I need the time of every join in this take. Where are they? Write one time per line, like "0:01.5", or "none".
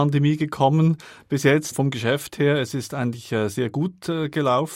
none